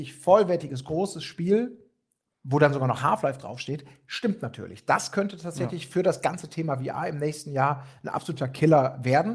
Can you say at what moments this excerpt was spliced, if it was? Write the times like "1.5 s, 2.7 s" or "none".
none